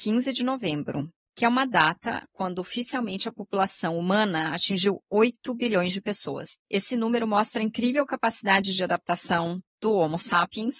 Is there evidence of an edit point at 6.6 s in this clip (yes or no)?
yes